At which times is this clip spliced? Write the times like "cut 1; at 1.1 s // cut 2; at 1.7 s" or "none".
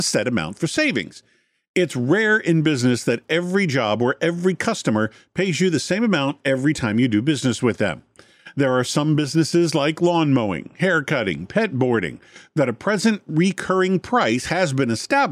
none